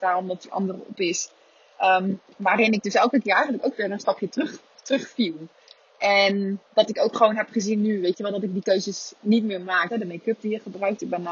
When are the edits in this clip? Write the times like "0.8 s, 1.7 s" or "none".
2.3 s, 9.9 s